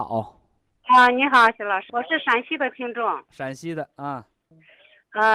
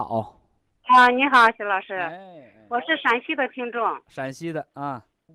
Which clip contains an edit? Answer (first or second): first